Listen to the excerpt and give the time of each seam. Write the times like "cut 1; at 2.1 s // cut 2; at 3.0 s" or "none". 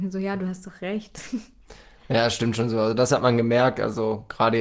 none